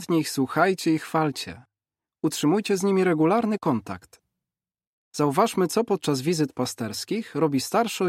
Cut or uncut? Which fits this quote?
uncut